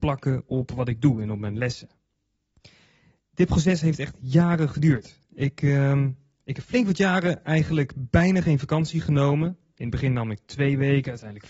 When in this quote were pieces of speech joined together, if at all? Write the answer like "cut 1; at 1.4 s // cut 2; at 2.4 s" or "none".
none